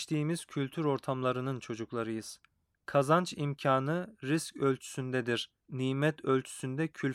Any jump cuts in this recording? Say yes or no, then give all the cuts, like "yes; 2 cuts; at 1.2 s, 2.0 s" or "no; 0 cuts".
yes; 2 cuts; at 2.7 s, 5.6 s